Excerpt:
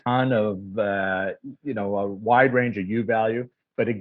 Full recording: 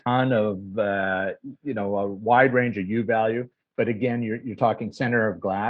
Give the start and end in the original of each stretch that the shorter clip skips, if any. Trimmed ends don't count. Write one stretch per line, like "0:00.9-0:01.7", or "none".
none